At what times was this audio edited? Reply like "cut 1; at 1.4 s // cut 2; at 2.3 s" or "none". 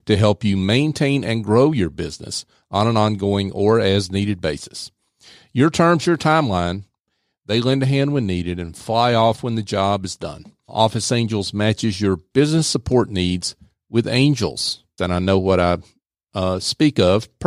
cut 1; at 10.7 s // cut 2; at 15.0 s